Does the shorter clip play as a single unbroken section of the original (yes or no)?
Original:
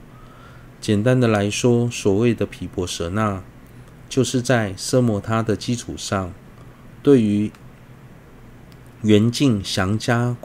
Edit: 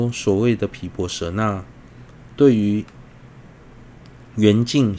no